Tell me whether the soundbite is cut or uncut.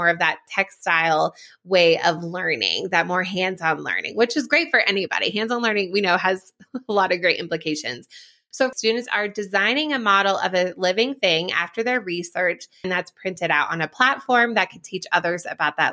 cut